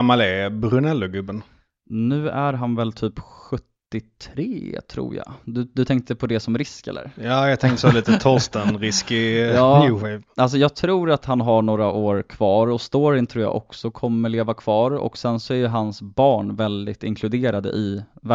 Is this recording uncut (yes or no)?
yes